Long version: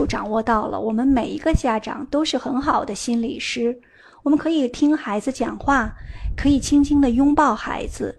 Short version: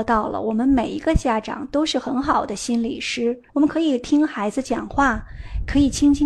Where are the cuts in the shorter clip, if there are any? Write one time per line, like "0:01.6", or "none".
0:03.5